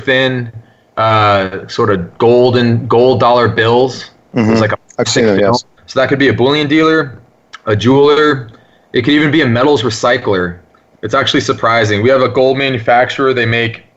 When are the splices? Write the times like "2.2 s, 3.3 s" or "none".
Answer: 5.8 s, 10.9 s